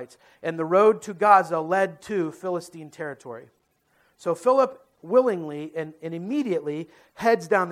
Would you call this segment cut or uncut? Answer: uncut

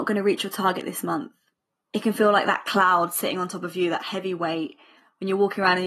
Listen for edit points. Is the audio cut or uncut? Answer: uncut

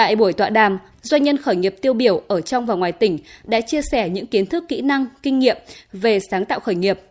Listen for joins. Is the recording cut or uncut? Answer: cut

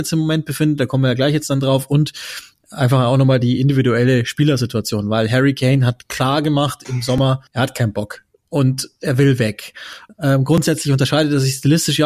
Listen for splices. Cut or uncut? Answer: cut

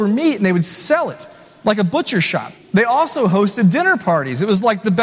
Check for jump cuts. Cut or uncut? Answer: cut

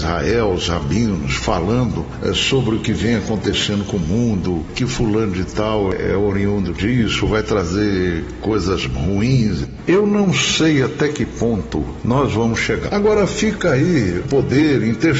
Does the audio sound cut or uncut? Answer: cut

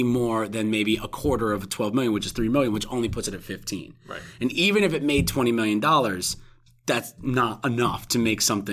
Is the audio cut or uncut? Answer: uncut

